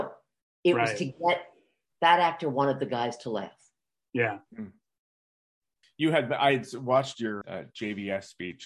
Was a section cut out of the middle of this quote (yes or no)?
yes